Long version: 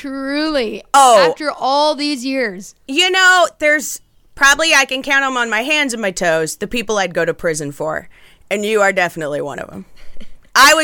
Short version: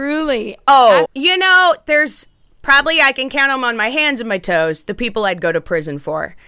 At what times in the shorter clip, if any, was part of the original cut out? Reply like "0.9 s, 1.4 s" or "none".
1.1 s

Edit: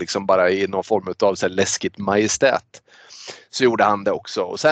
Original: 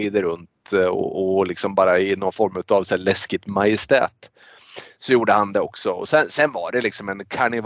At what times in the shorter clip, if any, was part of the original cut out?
none

